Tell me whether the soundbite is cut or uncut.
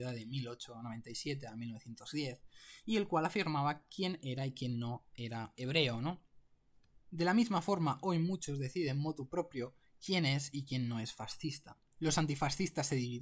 cut